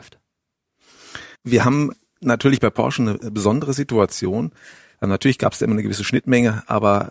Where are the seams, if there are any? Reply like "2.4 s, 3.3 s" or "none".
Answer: 1.4 s, 4.9 s